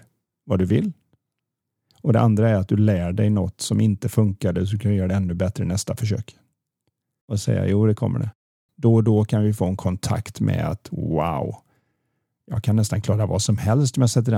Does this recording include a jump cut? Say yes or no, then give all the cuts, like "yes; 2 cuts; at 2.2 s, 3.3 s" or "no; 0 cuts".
yes; 2 cuts; at 7.2 s, 8.7 s